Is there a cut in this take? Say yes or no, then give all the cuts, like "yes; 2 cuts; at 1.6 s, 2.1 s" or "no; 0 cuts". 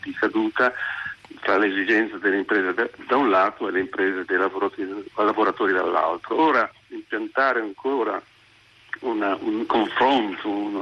no; 0 cuts